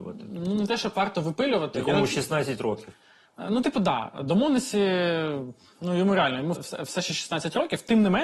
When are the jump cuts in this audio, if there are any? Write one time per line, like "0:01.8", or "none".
0:06.6